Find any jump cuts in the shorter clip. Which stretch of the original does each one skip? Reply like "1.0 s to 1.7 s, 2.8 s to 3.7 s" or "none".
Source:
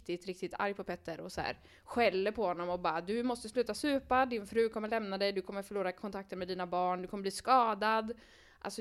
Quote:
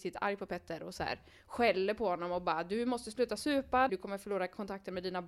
4.3 s to 5.3 s